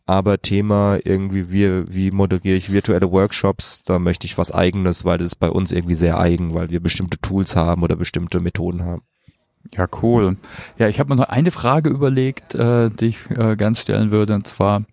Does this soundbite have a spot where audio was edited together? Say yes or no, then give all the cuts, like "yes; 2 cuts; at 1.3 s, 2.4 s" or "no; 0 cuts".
no; 0 cuts